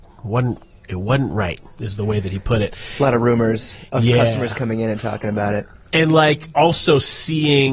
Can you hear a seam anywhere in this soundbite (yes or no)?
no